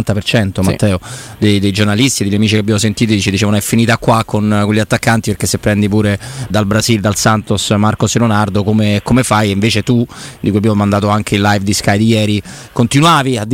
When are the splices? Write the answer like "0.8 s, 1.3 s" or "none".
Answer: 6.5 s